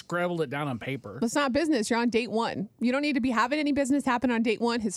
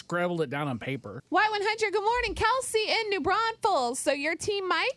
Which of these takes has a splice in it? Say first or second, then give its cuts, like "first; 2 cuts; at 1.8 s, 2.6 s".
second; 1 cut; at 1.2 s